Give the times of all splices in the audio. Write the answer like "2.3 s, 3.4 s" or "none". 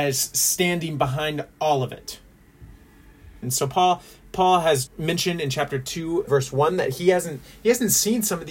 3.4 s, 4.9 s, 6.3 s